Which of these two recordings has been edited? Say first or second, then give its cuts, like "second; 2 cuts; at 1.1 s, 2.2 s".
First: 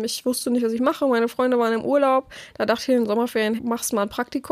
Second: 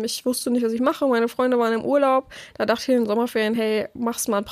first; 1 cut; at 3.6 s